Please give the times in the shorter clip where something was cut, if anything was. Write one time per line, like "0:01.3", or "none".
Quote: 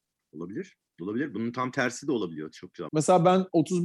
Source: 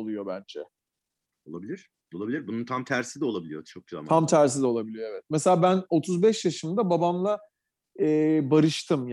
0:02.9